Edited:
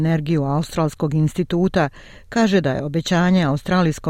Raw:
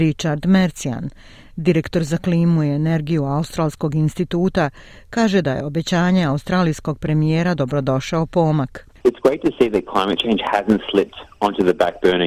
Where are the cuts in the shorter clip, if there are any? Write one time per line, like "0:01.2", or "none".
none